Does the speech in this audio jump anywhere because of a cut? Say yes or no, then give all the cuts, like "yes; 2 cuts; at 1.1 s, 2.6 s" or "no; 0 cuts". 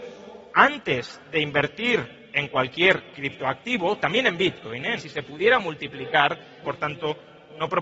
yes; 2 cuts; at 5.0 s, 6.6 s